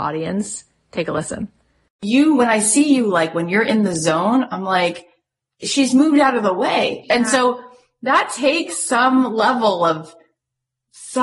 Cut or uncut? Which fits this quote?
uncut